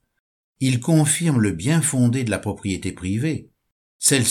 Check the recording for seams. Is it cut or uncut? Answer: uncut